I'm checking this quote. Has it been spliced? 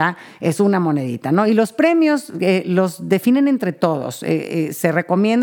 no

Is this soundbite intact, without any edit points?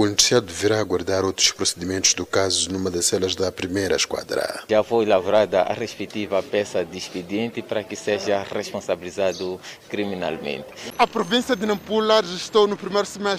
yes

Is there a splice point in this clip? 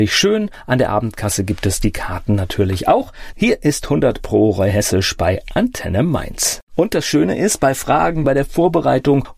yes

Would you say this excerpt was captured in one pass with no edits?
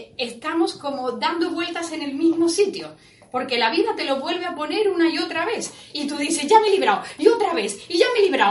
yes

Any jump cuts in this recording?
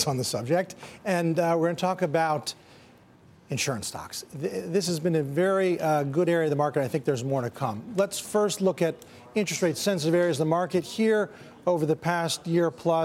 no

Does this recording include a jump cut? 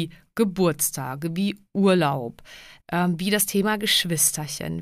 yes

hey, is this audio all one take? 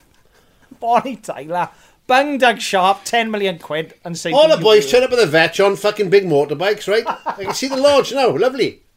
yes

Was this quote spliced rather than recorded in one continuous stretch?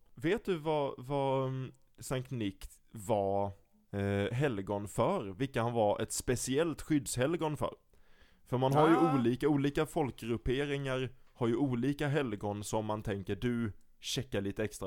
no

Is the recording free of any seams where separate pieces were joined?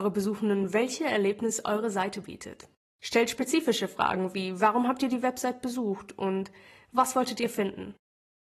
no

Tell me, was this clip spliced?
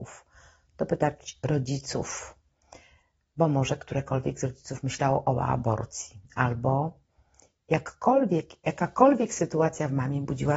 no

